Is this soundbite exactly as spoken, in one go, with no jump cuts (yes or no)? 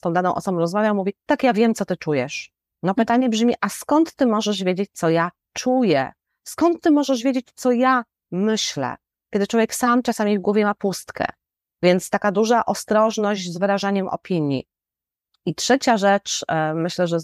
no